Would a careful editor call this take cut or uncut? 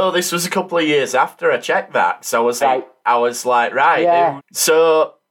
cut